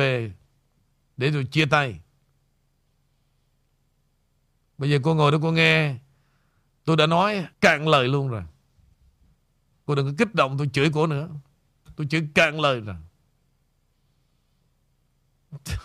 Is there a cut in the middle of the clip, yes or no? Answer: yes